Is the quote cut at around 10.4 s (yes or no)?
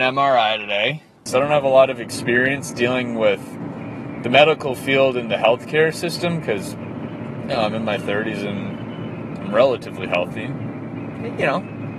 no